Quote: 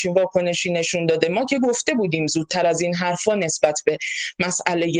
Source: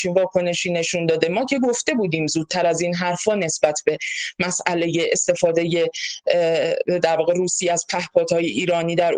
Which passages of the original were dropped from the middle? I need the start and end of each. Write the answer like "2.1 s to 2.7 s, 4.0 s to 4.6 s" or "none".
none